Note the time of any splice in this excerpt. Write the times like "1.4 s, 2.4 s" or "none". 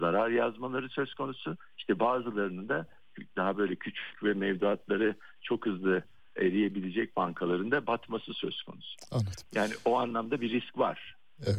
none